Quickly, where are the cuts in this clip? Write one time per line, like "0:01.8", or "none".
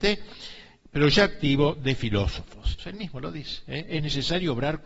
0:02.8